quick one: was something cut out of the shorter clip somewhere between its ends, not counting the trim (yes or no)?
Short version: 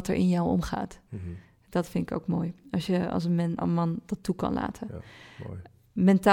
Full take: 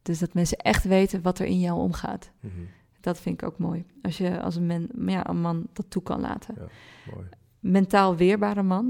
yes